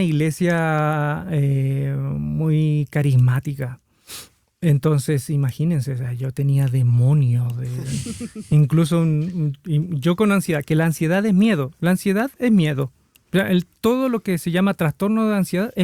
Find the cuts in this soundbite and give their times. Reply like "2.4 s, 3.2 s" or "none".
none